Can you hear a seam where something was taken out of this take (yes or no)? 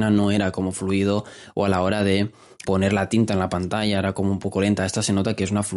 yes